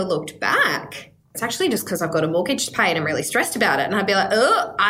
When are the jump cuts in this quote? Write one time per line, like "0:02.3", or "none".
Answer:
0:01.3